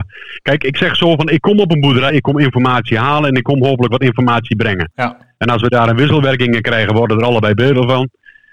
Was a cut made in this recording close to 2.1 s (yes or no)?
yes